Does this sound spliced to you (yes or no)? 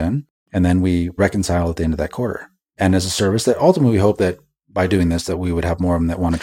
no